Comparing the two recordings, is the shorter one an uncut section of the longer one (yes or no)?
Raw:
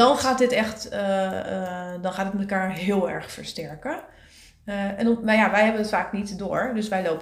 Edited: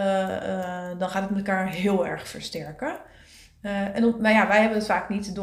yes